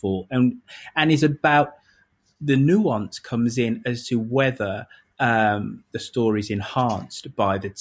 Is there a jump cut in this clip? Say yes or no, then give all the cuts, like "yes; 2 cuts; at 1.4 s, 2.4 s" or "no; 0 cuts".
no; 0 cuts